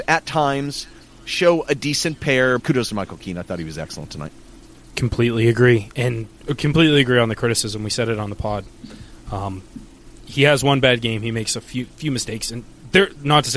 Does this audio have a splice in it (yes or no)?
yes